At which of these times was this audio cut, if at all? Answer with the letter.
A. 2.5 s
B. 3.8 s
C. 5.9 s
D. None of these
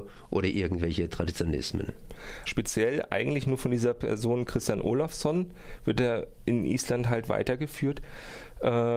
A